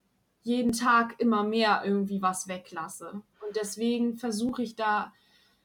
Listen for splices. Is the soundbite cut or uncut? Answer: cut